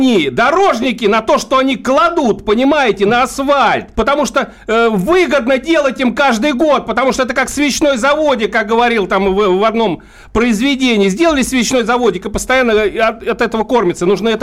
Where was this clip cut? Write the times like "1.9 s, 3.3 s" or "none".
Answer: 3.9 s